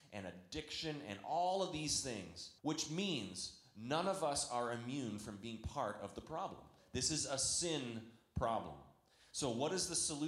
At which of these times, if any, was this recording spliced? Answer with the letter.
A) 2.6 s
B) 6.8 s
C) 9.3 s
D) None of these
A